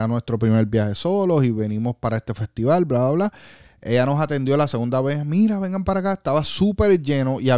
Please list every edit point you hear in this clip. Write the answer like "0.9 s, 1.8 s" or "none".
none